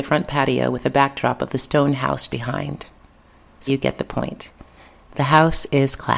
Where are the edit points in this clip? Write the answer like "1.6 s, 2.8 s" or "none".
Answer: 2.3 s, 3.7 s

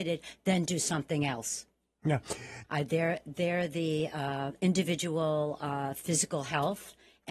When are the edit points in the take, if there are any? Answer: 2.6 s, 4.6 s

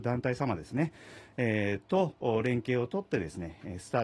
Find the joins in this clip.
none

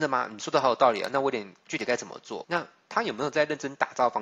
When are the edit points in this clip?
2.4 s

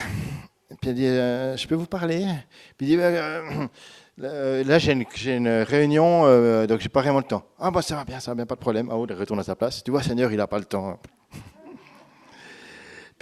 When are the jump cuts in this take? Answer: none

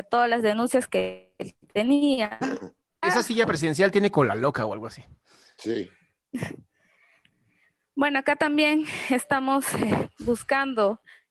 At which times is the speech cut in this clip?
3.0 s

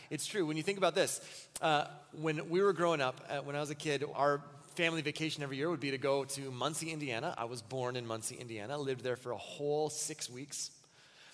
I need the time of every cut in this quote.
none

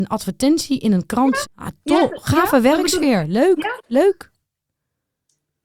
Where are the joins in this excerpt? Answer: 1.4 s

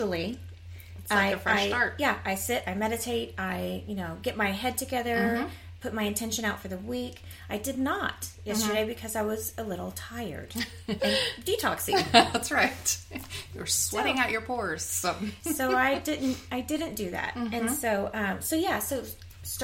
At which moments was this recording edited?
11.0 s

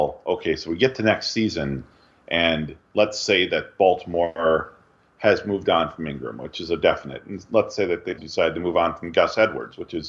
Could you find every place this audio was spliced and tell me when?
8.2 s

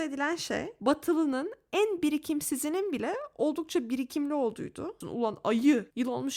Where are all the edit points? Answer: 5.0 s

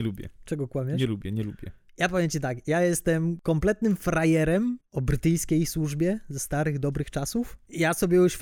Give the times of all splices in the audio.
1.9 s, 4.8 s

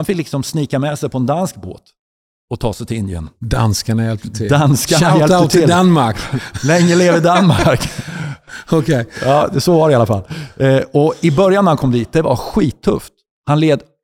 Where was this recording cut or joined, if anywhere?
none

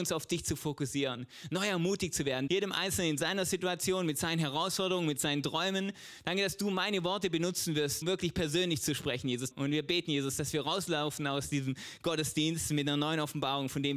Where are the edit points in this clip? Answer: 2.5 s, 8.0 s, 9.5 s

